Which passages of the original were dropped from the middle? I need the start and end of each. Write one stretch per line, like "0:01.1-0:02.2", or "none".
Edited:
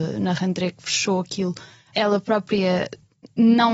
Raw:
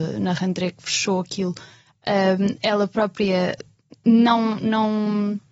0:01.9-0:02.6